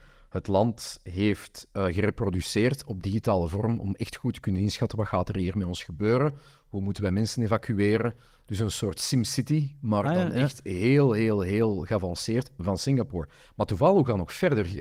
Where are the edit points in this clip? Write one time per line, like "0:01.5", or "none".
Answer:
none

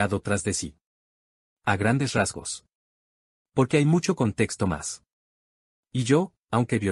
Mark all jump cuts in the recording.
none

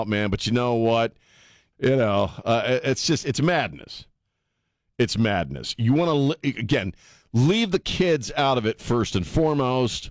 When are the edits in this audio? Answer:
0:01.7

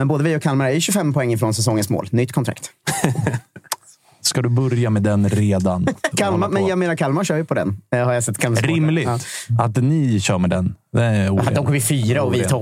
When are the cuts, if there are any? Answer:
0:06.1

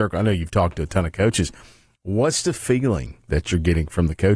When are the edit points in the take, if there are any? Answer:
none

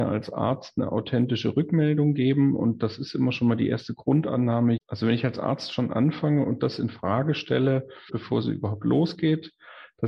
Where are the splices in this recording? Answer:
0:04.8
0:08.1

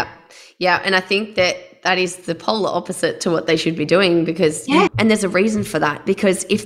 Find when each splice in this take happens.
0:04.9

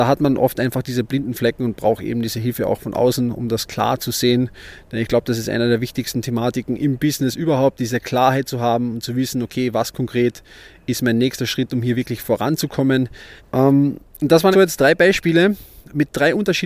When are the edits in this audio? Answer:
0:13.4
0:14.5

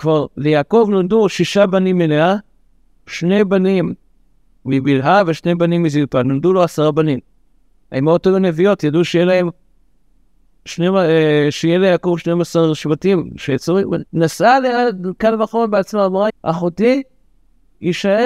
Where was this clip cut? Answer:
0:14.1
0:16.3

